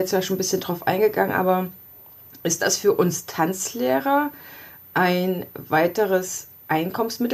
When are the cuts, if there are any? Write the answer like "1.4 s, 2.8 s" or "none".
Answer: none

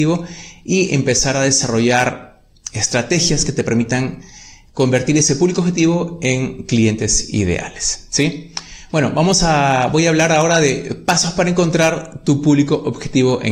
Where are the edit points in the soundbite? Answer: none

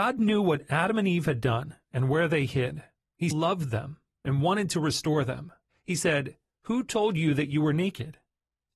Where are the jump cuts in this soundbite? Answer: 3.3 s, 5.7 s

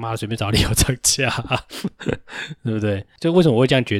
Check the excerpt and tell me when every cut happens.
none

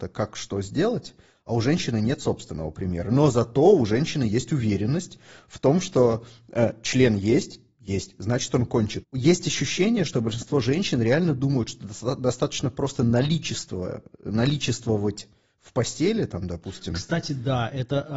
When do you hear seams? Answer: none

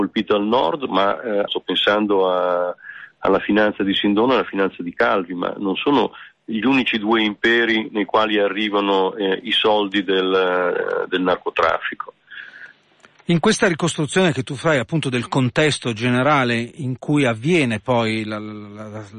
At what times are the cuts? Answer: 1.5 s

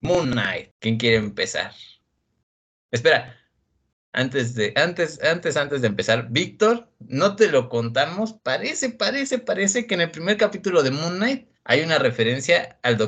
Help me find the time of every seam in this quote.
8.4 s, 11.5 s

